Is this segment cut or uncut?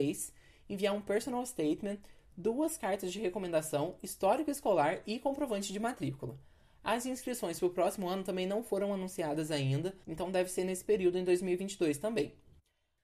cut